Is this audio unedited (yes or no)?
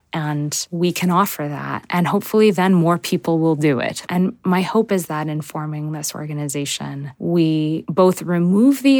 no